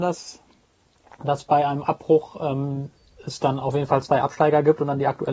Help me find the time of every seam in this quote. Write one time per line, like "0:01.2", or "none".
none